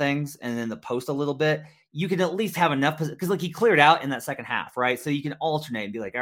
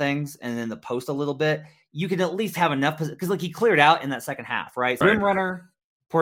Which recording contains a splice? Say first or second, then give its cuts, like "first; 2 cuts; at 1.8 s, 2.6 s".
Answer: second; 1 cut; at 5.0 s